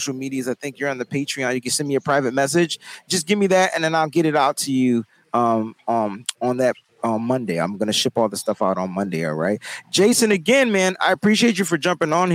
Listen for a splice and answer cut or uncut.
uncut